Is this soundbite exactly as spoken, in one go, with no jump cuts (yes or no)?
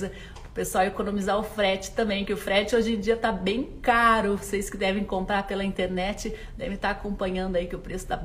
yes